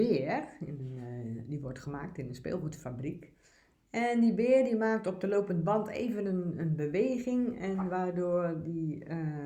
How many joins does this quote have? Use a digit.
0